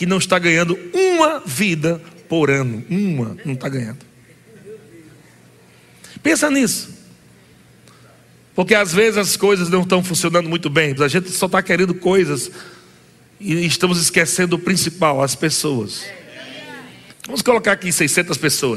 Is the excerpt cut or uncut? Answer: cut